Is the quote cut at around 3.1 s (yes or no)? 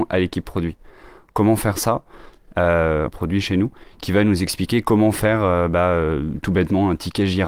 yes